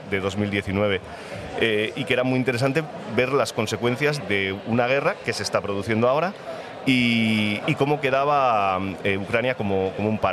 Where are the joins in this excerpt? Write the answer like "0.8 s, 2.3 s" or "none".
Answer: 4.2 s, 7.6 s

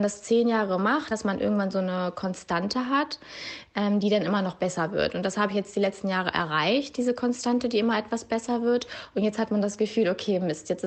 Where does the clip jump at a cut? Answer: 1.1 s

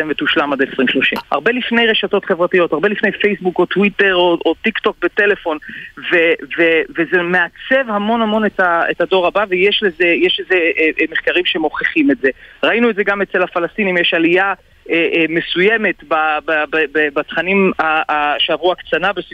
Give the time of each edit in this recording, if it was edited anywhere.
1.2 s

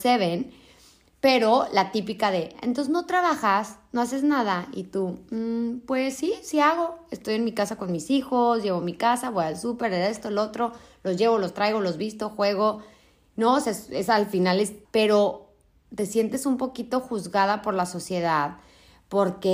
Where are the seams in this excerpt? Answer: 14.8 s

